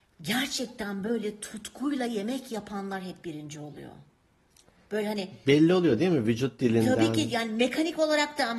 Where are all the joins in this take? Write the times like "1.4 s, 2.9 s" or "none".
none

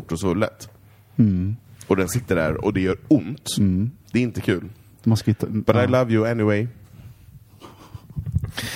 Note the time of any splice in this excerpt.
none

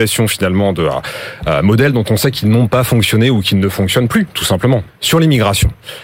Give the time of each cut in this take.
4.9 s

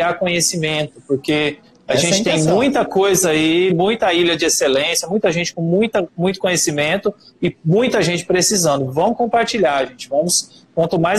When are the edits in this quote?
none

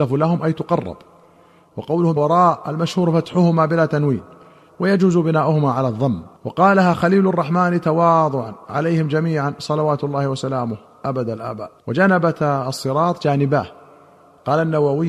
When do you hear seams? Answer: 2.2 s, 6.4 s, 11.8 s

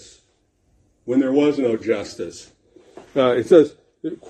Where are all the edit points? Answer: 3.1 s

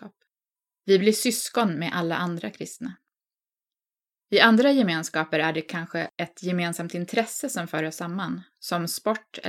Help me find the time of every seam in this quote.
none

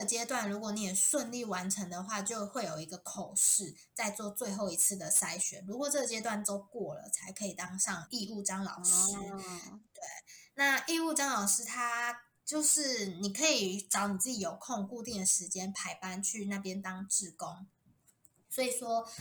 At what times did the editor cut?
8.1 s

